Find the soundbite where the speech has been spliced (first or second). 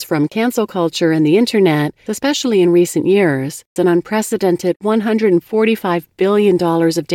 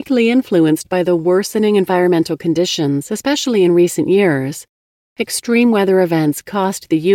first